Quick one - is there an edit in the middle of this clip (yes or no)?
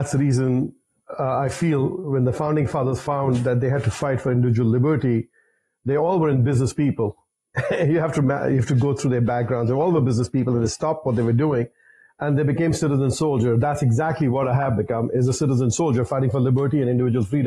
no